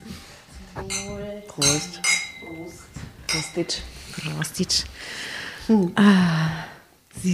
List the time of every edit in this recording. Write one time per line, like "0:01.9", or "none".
none